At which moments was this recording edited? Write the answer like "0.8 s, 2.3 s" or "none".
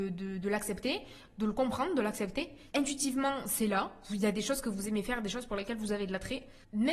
2.7 s